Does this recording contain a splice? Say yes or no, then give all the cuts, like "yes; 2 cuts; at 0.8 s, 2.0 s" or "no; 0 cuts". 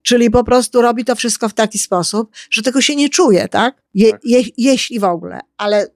yes; 1 cut; at 3.9 s